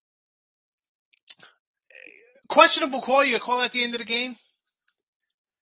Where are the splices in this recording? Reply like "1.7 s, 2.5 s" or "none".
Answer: none